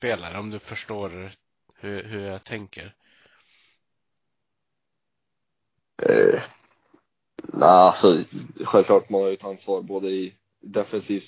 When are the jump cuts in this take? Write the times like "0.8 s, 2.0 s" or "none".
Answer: none